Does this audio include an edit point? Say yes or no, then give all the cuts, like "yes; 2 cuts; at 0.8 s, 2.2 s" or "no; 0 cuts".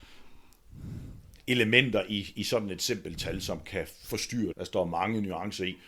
yes; 1 cut; at 4.5 s